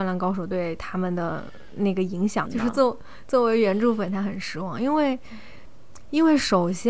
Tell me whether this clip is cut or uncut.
cut